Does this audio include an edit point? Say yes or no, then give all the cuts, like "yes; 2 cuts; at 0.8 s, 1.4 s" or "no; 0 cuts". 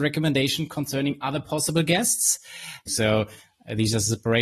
yes; 1 cut; at 2.9 s